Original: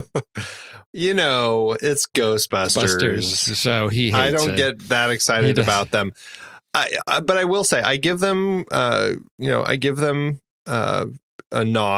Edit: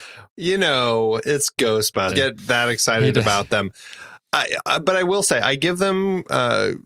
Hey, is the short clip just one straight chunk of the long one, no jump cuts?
no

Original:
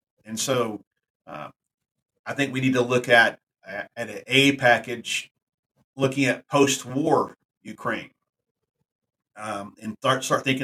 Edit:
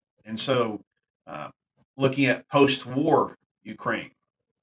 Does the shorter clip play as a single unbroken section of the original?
no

